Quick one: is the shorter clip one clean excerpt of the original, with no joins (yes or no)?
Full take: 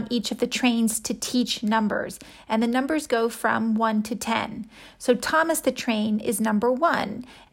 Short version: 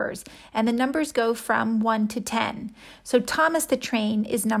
yes